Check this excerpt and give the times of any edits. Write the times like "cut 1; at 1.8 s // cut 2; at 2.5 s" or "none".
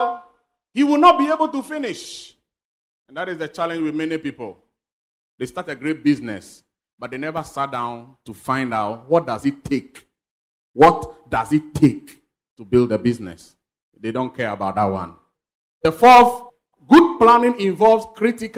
none